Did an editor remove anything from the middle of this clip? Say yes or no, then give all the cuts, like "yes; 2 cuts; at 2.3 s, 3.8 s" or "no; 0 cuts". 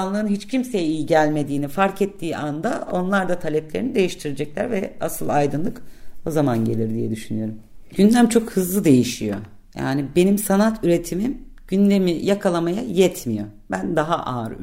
no; 0 cuts